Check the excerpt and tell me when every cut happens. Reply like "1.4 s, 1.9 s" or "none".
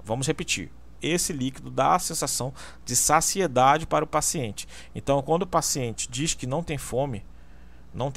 1.0 s